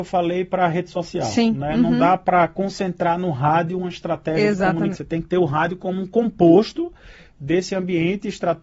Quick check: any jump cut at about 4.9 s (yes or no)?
yes